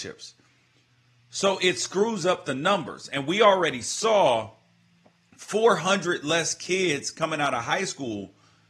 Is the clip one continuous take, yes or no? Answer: yes